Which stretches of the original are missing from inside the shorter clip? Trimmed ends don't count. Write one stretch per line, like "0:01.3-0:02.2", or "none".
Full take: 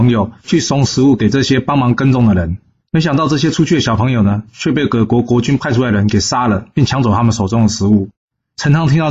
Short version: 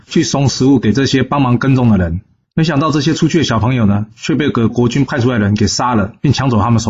0:05.1-0:05.2